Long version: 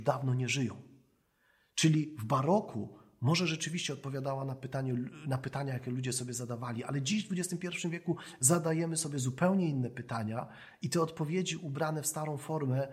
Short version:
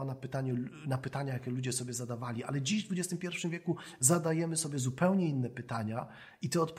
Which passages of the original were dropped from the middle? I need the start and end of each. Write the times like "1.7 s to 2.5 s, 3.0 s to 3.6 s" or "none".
none